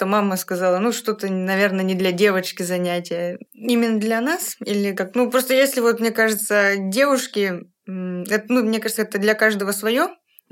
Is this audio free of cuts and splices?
no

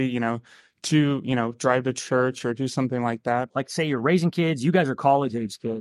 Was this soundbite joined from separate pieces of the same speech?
yes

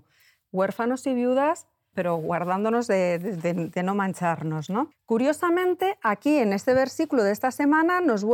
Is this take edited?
yes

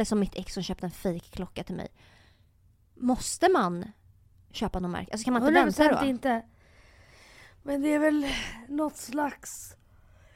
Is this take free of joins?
yes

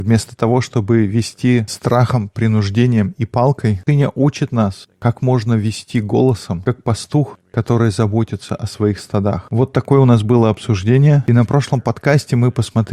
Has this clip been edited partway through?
no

